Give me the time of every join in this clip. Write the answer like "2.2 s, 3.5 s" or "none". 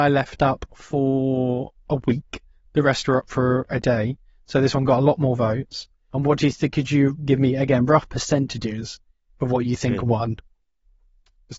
6.1 s